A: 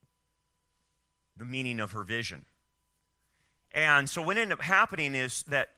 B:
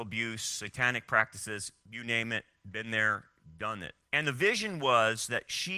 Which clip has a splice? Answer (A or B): B